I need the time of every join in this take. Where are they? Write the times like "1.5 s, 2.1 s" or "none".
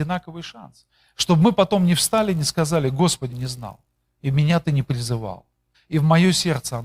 3.3 s, 5.7 s

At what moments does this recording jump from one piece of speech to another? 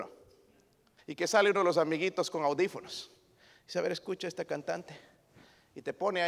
1.0 s

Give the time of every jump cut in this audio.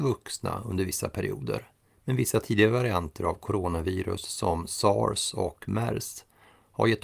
2.0 s

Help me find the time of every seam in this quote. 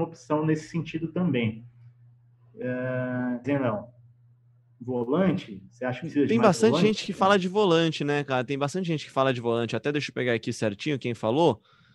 3.4 s

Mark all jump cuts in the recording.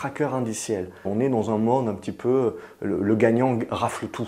1.0 s

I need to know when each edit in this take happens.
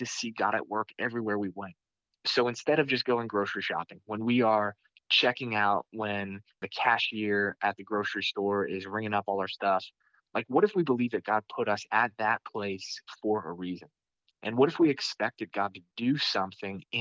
none

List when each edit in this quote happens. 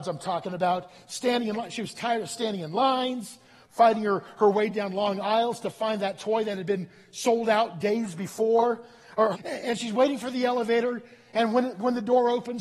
9.3 s

